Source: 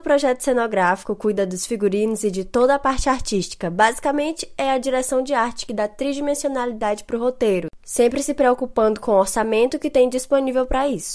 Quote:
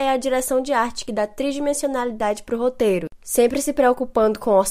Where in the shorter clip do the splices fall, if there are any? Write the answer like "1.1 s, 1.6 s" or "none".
none